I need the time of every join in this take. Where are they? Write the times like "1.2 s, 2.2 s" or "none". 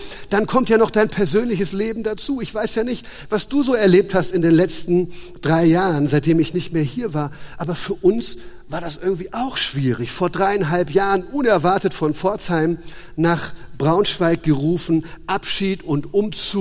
none